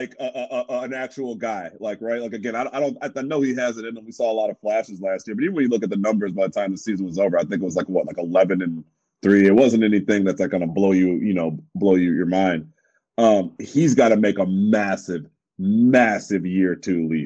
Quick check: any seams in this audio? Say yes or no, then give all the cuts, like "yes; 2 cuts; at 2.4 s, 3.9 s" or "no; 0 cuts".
no; 0 cuts